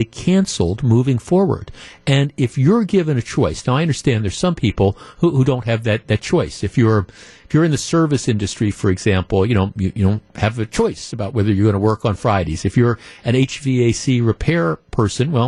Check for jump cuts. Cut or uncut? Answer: uncut